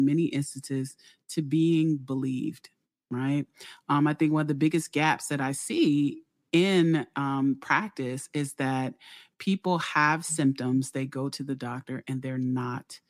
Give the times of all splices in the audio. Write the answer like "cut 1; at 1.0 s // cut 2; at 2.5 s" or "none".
none